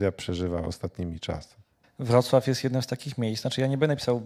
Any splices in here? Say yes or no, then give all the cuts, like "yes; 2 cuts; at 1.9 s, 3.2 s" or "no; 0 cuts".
yes; 1 cut; at 1.8 s